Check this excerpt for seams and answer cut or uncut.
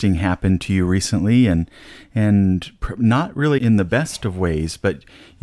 cut